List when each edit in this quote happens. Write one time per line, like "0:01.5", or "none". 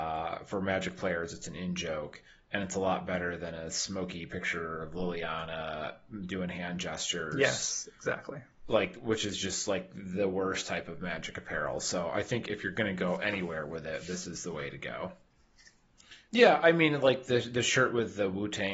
0:16.3